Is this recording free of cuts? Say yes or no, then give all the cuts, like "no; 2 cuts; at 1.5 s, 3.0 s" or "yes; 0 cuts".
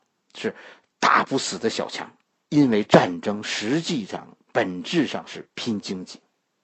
no; 1 cut; at 2.5 s